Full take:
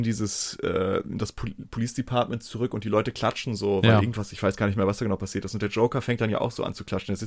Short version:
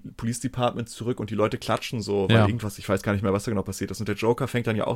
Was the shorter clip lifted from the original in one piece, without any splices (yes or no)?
yes